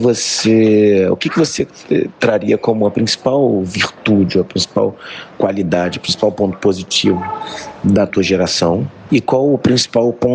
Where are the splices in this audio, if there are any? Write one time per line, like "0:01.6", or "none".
0:09.1